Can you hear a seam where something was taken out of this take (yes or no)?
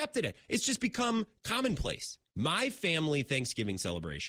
yes